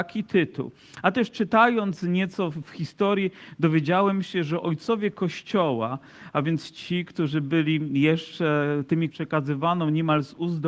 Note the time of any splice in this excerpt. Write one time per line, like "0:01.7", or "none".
0:09.1